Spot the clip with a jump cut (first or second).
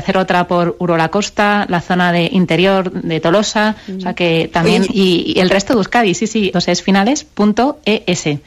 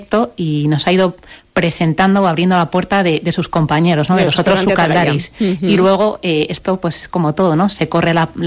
first